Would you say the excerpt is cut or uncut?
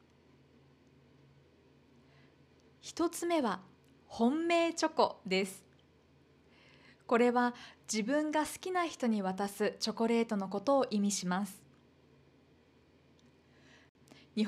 uncut